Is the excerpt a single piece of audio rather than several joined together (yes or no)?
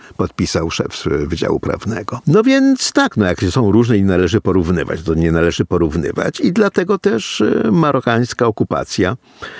yes